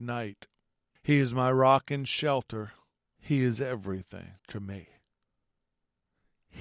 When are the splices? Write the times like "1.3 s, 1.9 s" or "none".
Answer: 1.0 s, 3.2 s, 4.4 s